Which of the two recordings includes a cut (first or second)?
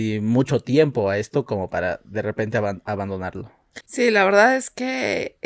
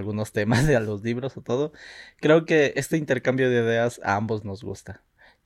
first